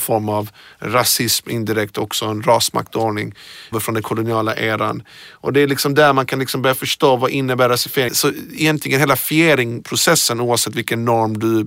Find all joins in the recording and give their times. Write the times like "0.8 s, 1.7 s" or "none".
3.7 s, 8.1 s